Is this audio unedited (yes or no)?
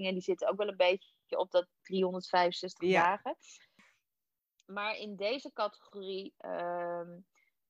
yes